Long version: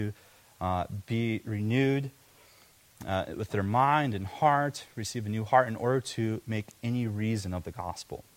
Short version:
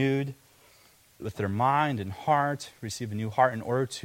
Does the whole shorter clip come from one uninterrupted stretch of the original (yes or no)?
no